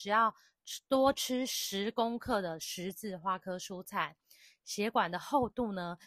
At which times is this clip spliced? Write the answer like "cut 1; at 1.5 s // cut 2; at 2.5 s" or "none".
none